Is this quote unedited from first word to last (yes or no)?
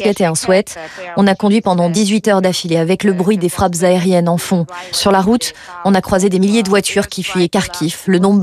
no